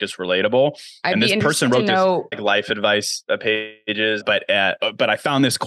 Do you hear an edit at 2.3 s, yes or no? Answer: yes